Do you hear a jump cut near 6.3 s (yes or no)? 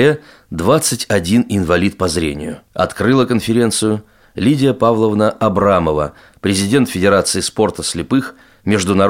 yes